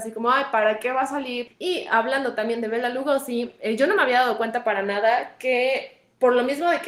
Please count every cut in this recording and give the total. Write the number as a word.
one